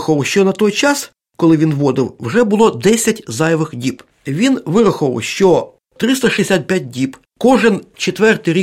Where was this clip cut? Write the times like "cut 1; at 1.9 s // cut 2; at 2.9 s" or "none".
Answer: cut 1; at 4.1 s

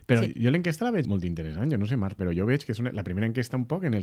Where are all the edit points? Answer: cut 1; at 1.0 s // cut 2; at 2.2 s

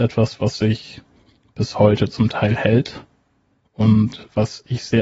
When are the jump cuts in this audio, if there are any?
none

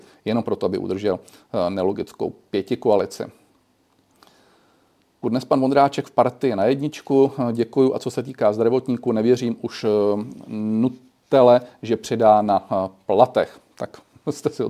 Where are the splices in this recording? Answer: cut 1; at 5.2 s

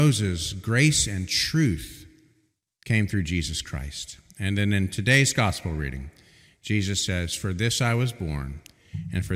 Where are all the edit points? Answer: none

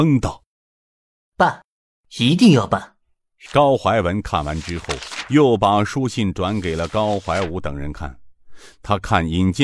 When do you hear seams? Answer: cut 1; at 3.5 s

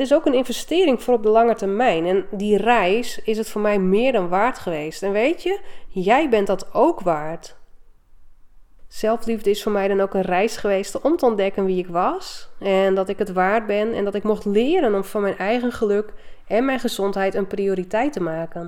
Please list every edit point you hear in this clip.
none

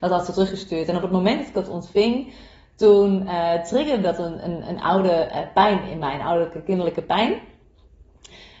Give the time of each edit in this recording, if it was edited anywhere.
none

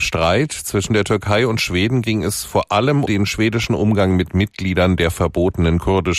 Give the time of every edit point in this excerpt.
cut 1; at 3.1 s

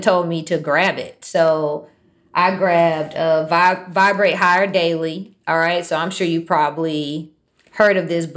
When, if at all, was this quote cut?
none

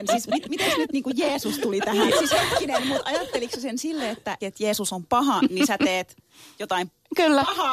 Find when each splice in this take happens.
cut 1; at 2.1 s // cut 2; at 4.4 s

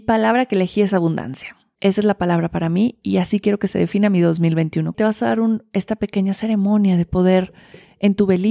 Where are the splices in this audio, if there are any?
cut 1; at 1.8 s // cut 2; at 4.9 s

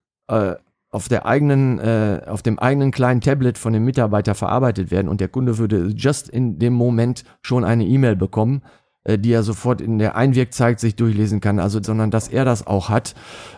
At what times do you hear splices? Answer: cut 1; at 9.0 s // cut 2; at 11.8 s

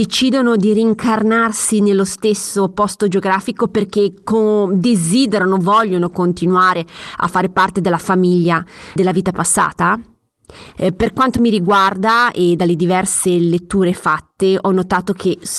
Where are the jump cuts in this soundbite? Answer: cut 1; at 9.0 s // cut 2; at 10.8 s

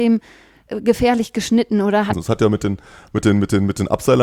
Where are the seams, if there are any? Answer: cut 1; at 2.1 s

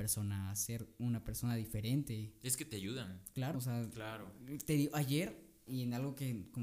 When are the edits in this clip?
cut 1; at 3.5 s // cut 2; at 5.7 s

